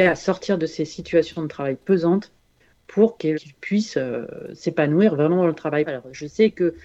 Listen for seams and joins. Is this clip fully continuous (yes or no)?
no